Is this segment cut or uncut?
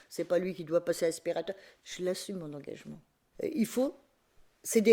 cut